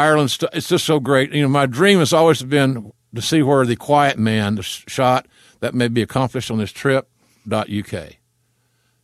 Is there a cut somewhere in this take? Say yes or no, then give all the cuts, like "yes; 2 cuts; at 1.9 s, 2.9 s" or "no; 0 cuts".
yes; 2 cuts; at 4.6 s, 7.4 s